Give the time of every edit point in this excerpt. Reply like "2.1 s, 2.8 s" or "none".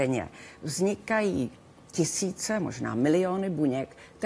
none